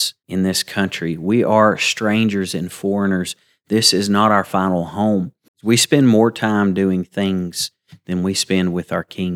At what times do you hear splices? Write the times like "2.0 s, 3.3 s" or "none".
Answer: 5.5 s